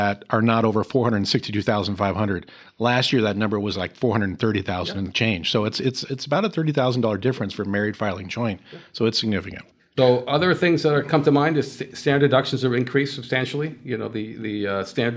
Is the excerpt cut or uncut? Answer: uncut